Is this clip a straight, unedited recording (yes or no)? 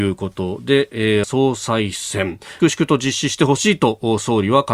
no